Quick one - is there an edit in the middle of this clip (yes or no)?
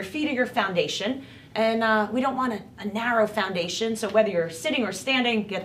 no